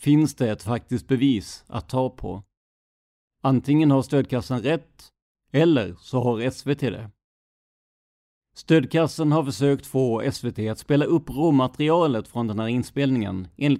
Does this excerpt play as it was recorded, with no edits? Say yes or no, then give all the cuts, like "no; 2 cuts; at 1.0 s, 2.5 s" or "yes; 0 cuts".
yes; 0 cuts